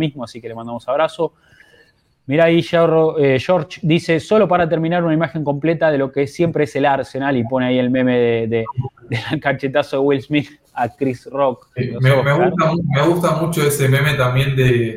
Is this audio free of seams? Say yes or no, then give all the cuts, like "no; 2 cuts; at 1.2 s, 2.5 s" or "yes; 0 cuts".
no; 1 cut; at 11.8 s